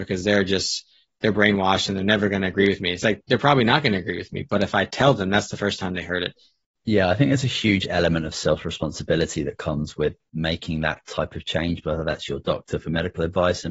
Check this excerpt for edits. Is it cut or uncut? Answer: cut